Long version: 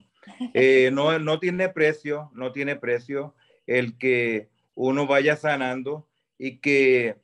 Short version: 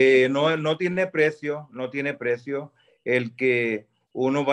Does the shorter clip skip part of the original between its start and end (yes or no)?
no